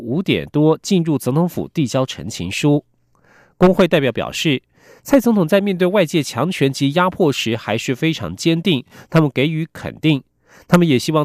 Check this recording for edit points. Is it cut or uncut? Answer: uncut